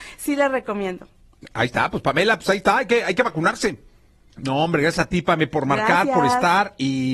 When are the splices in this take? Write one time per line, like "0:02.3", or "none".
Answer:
0:04.3

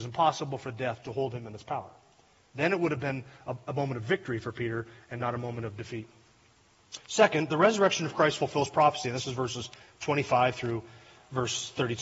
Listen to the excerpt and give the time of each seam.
none

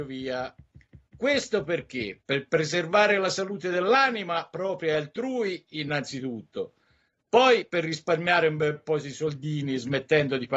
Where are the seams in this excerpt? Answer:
none

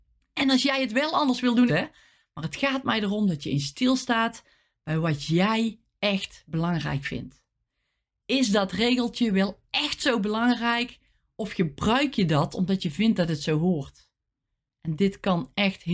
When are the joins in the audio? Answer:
0:01.7

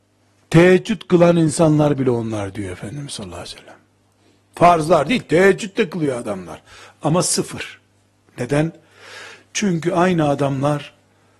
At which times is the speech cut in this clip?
none

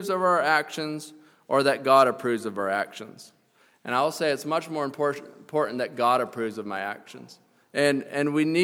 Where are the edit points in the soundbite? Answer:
0:07.6

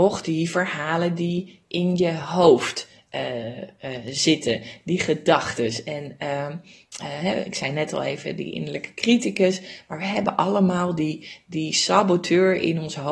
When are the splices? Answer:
none

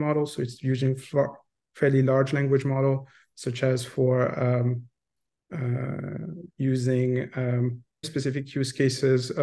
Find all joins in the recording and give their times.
0:06.5
0:08.0

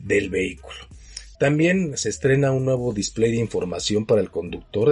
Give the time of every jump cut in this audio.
0:01.3

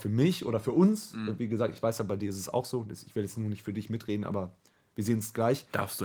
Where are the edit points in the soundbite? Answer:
none

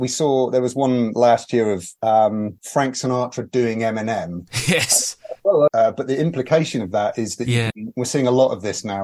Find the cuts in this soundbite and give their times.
0:05.7
0:07.7

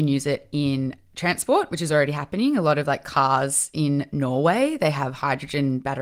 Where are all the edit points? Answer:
none

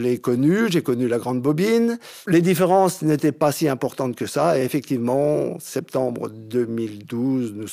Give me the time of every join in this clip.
none

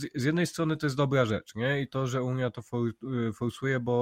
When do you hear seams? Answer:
none

